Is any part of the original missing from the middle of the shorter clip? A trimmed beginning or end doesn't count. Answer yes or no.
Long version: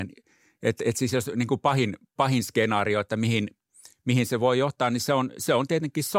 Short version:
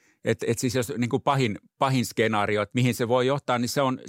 yes